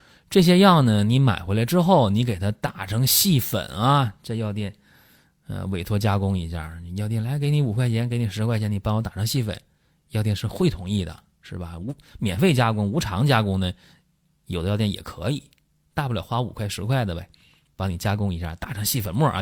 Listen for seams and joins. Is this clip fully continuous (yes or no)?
yes